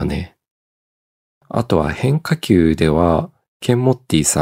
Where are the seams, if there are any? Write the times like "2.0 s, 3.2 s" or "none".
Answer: none